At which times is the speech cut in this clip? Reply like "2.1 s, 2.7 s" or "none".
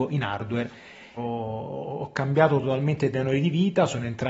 1.2 s